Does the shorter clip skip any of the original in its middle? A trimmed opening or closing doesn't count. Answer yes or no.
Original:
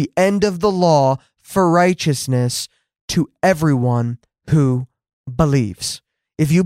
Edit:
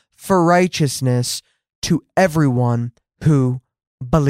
no